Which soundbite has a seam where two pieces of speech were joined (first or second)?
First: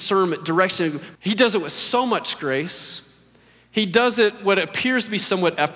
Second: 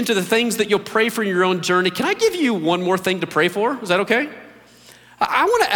first